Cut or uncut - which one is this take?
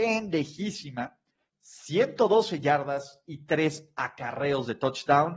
cut